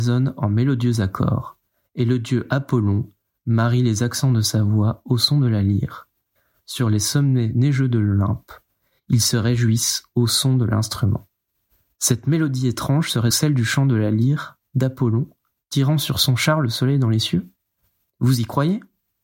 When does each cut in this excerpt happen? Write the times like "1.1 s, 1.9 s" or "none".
13.3 s